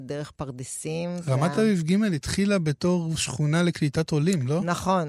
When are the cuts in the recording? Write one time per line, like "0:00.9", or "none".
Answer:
none